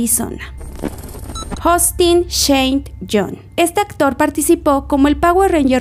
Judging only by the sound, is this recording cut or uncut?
uncut